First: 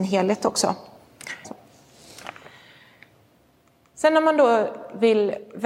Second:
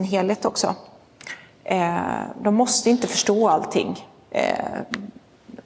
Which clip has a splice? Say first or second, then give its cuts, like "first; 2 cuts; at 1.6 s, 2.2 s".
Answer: first; 1 cut; at 1.4 s